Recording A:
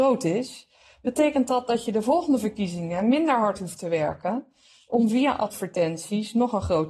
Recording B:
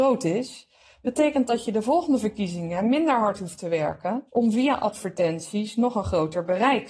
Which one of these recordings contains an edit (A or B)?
B